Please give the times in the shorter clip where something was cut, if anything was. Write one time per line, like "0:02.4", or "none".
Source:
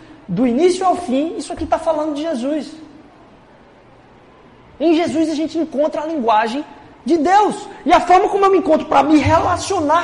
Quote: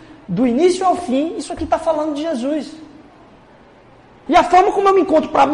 0:04.3